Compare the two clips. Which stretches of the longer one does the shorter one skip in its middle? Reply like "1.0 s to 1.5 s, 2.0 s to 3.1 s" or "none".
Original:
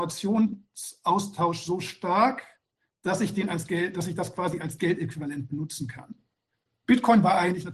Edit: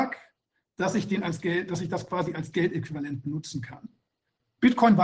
none